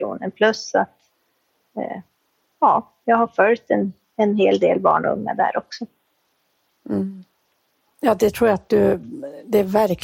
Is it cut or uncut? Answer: uncut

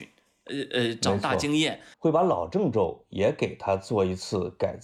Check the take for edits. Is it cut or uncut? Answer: cut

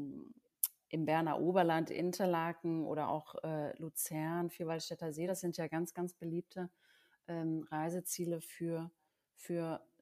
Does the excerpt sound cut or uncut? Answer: uncut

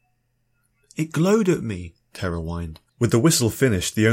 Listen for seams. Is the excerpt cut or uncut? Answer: cut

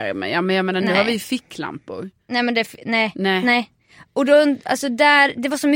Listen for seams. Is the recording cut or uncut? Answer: uncut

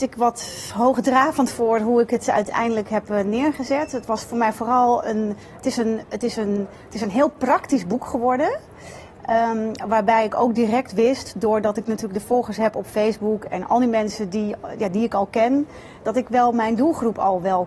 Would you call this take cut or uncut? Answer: uncut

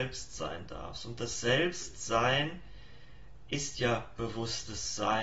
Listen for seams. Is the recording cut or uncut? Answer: uncut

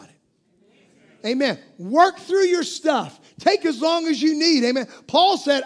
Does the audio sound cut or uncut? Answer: uncut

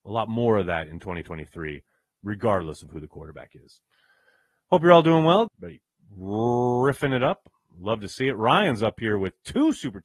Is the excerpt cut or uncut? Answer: cut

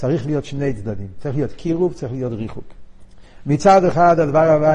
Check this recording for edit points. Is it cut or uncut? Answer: uncut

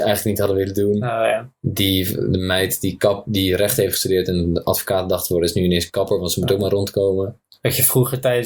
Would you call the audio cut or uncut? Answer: uncut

